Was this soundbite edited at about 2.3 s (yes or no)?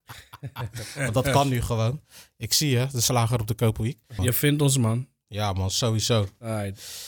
no